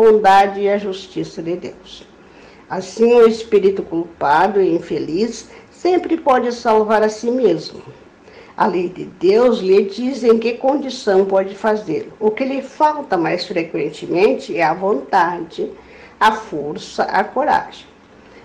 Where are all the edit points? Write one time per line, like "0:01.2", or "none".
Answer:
none